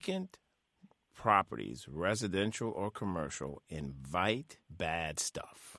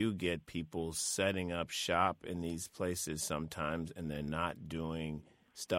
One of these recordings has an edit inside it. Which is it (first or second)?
first